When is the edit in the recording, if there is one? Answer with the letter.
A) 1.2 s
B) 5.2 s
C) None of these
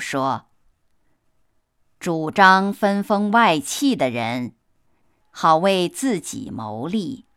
B